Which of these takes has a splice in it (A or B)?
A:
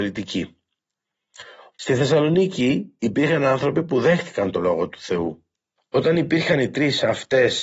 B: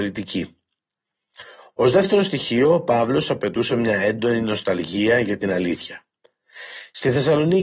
A